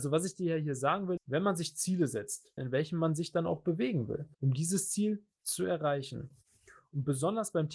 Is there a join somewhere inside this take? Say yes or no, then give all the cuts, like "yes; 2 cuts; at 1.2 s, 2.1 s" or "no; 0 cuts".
yes; 3 cuts; at 1.2 s, 2.6 s, 4.3 s